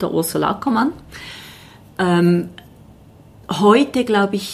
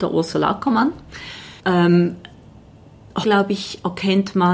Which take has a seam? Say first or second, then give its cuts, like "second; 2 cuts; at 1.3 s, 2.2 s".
second; 2 cuts; at 1.6 s, 3.2 s